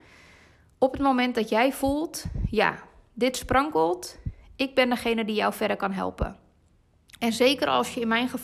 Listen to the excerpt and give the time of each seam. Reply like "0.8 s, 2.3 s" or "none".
7.2 s